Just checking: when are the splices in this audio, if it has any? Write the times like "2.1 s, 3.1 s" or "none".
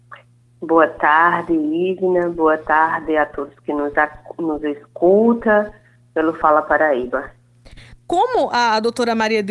none